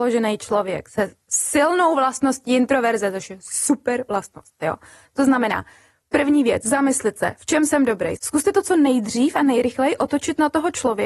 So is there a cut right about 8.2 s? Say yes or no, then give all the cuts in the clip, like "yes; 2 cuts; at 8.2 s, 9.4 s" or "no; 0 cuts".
yes; 1 cut; at 8.2 s